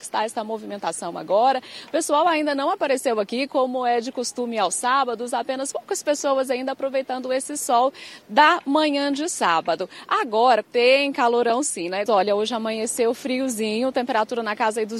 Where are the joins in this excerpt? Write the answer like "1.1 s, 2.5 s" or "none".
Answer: 10.6 s, 12.1 s